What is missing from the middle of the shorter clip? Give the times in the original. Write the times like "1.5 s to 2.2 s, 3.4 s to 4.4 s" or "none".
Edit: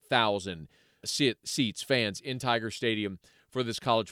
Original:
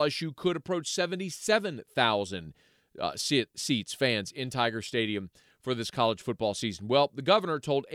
2.9 s to 3.1 s